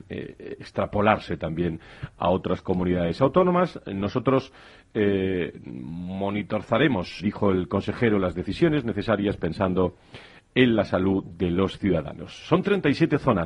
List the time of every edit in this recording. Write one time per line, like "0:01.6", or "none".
0:07.2